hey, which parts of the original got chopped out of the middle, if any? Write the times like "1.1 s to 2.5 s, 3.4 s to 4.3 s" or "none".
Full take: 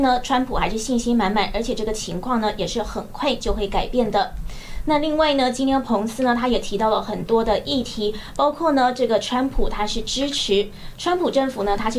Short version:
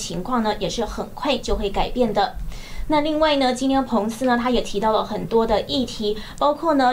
none